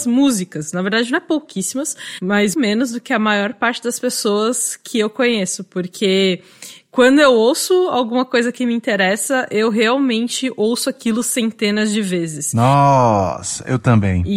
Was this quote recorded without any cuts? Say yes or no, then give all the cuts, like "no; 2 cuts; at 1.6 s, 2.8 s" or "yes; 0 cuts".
no; 1 cut; at 2.5 s